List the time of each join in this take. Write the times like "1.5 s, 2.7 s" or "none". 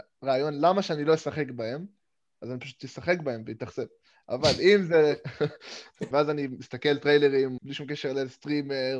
6.1 s, 7.6 s